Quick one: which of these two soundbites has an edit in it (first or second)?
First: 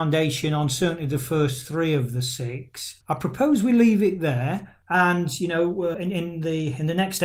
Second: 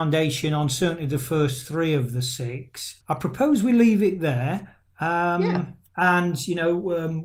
first